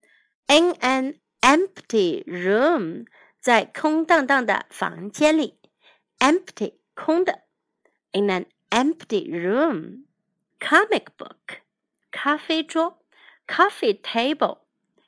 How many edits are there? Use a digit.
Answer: 2